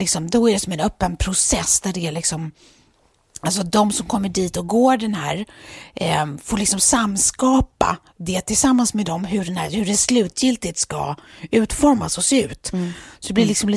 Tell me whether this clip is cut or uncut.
uncut